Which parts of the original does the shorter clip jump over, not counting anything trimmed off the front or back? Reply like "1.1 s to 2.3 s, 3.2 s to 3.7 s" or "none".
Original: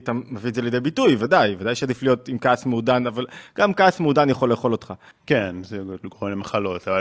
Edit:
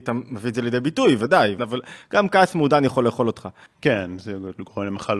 1.6 s to 3.0 s